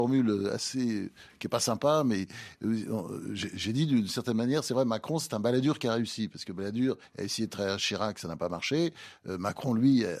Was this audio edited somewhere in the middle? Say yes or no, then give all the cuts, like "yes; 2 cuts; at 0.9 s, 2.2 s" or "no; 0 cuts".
no; 0 cuts